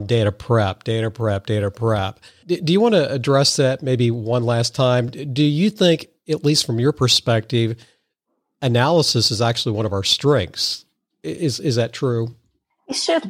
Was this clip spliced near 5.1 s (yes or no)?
no